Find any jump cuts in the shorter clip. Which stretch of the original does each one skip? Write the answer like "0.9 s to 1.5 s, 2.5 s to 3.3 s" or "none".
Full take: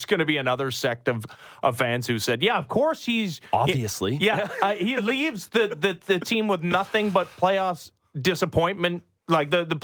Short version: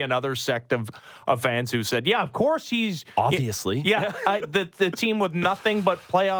4.8 s to 5.7 s